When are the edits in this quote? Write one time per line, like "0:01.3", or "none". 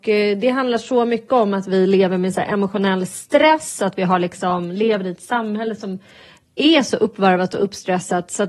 none